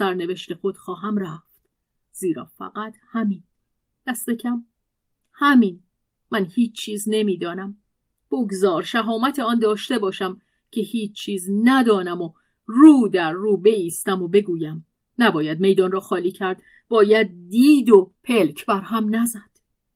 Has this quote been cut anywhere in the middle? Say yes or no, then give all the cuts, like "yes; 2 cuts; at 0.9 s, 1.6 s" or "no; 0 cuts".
yes; 3 cuts; at 6.2 s, 15.1 s, 18.2 s